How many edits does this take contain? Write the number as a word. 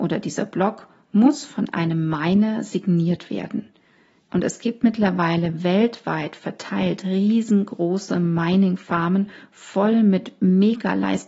one